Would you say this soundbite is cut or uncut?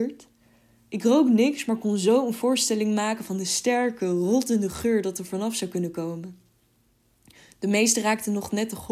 uncut